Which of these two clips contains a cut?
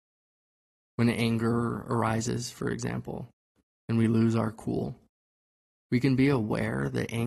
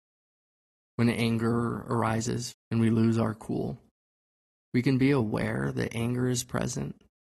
second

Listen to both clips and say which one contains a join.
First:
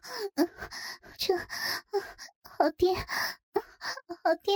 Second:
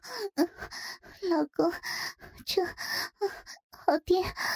first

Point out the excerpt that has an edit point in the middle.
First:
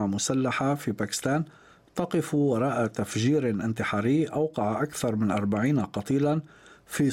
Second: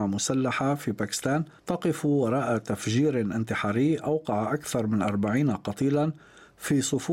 second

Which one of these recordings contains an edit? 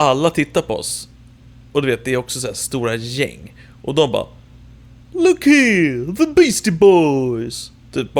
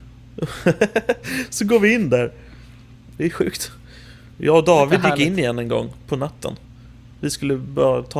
second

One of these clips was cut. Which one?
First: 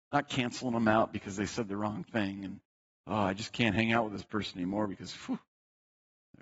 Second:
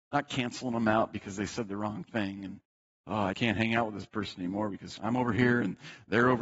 second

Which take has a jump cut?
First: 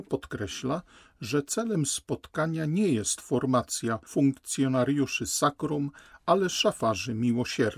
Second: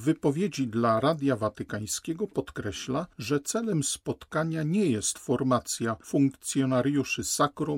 second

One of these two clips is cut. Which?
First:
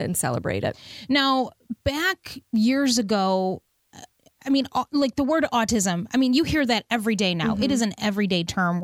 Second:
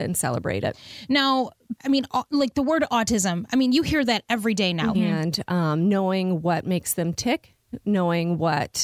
second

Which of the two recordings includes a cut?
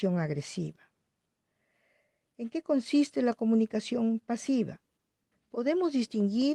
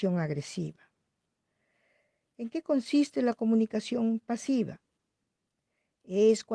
first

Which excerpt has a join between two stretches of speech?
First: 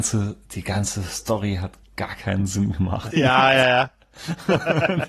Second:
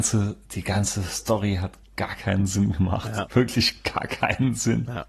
first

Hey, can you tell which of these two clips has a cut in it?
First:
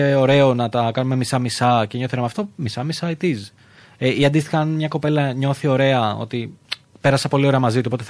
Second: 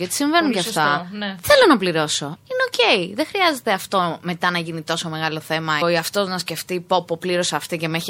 second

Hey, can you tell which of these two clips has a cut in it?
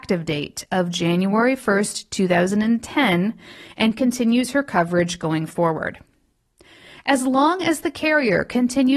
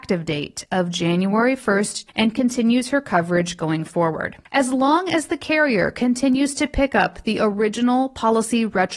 second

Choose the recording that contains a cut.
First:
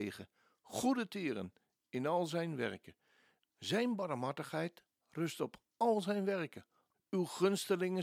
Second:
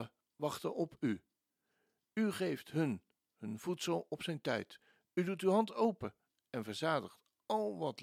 first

